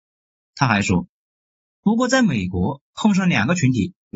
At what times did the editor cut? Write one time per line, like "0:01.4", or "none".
none